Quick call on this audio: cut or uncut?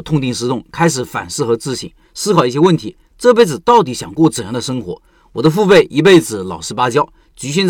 uncut